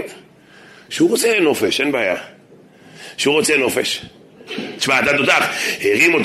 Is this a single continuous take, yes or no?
no